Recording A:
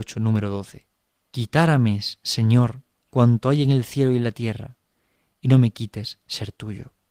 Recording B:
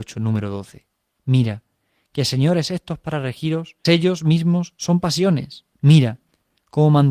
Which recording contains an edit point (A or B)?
B